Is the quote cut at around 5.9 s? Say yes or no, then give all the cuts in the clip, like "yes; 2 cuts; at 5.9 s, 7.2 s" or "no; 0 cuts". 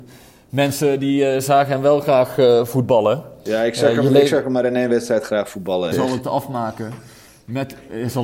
yes; 1 cut; at 5.9 s